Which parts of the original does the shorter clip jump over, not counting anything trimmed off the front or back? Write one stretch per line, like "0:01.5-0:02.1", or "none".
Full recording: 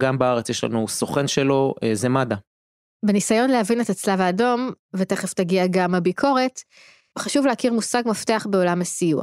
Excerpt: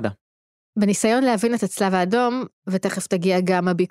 none